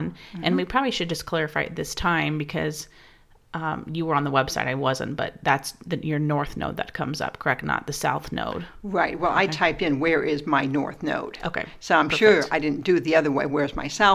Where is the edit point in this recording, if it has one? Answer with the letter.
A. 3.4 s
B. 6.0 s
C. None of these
C